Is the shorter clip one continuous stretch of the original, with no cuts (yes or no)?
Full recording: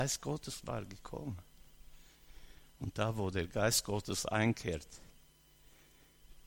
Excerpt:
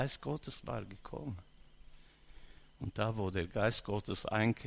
yes